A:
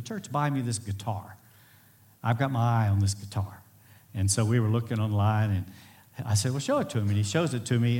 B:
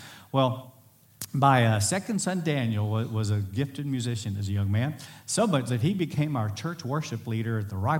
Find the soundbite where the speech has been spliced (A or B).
B